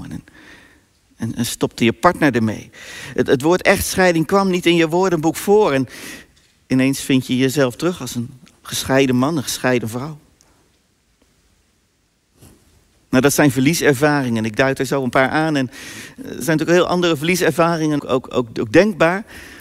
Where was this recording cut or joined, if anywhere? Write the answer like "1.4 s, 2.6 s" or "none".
18.0 s

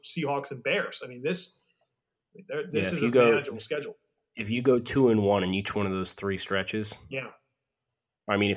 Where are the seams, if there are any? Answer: none

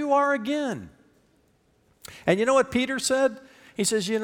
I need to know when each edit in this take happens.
none

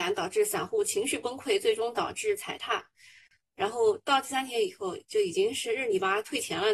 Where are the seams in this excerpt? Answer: 3.4 s

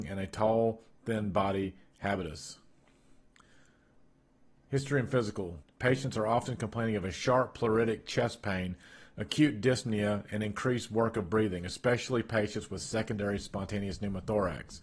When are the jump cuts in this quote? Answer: 5.6 s

